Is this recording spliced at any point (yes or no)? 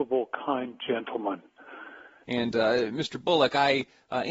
yes